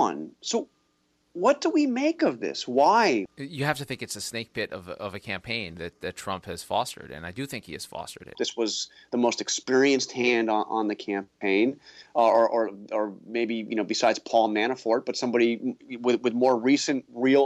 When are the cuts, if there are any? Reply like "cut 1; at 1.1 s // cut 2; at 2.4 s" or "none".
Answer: cut 1; at 3.3 s // cut 2; at 8.3 s